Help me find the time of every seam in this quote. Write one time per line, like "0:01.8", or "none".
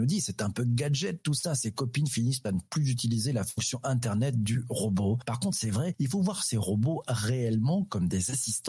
none